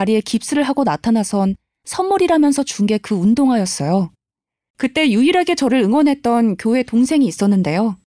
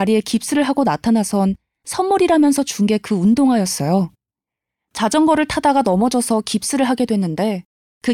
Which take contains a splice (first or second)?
first